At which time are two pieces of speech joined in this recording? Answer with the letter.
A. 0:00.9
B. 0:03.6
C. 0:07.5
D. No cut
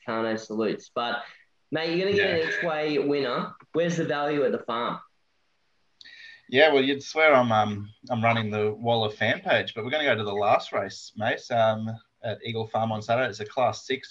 B